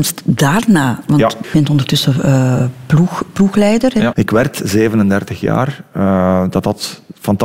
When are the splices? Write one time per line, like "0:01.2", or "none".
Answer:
0:01.4
0:04.1